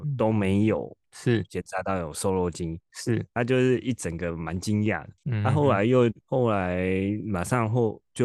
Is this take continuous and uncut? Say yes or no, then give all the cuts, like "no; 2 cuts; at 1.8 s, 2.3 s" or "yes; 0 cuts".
no; 1 cut; at 2.9 s